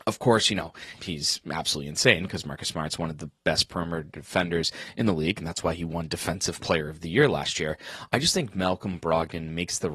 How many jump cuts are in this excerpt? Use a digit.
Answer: 1